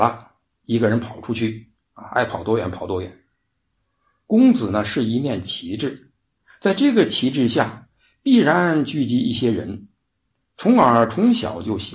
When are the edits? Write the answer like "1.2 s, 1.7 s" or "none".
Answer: none